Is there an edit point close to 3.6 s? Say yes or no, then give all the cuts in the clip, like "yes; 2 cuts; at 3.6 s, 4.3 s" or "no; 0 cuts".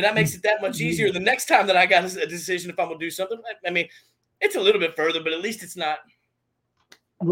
no; 0 cuts